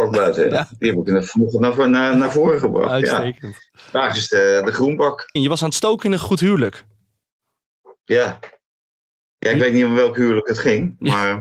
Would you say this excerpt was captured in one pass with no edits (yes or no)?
no